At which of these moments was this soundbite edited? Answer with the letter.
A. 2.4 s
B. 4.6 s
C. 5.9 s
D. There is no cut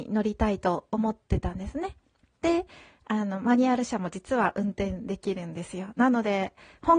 A